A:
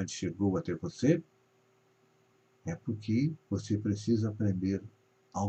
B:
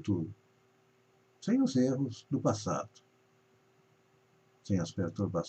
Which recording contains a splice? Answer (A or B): A